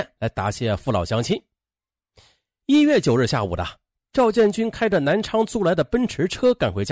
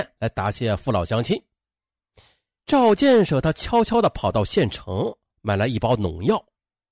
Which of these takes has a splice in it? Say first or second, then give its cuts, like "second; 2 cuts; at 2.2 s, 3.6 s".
second; 1 cut; at 2.6 s